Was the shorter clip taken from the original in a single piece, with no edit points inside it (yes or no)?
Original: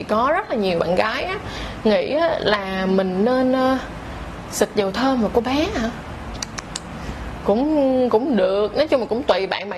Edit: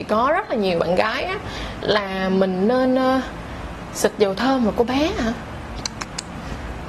no